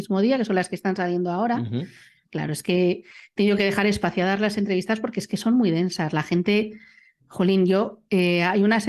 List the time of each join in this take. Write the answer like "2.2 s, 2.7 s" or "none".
2.3 s